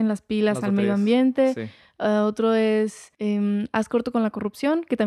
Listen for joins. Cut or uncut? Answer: cut